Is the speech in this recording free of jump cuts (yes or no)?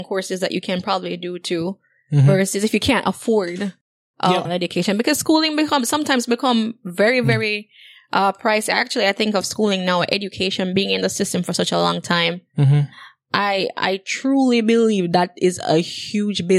no